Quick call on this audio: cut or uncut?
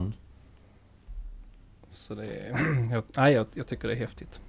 uncut